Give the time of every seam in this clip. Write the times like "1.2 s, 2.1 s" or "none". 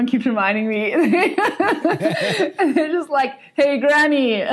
none